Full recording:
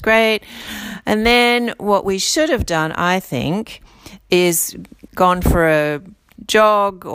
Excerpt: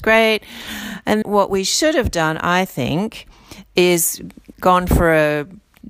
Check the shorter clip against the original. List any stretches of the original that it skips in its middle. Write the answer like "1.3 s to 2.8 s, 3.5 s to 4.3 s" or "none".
1.2 s to 1.8 s